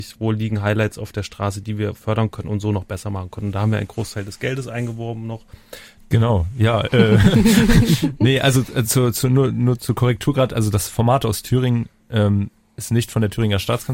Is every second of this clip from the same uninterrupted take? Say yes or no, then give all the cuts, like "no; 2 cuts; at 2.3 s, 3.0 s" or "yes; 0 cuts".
no; 1 cut; at 6.0 s